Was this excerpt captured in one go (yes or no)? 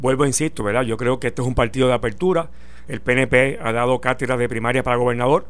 yes